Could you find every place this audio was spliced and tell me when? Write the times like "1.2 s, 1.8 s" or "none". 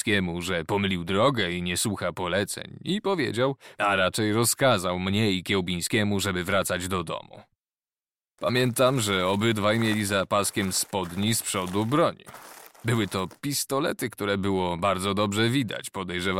8.4 s